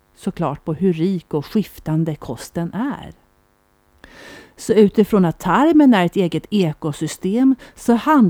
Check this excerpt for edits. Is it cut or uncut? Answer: uncut